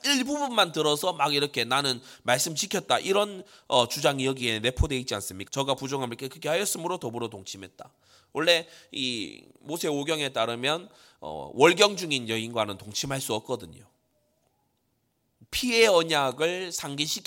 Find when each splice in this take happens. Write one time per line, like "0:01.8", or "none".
0:05.5